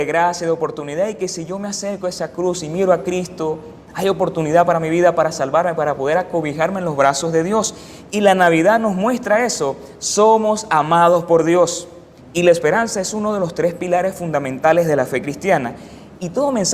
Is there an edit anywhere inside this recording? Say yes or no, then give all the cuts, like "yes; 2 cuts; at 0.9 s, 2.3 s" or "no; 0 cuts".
yes; 1 cut; at 12.2 s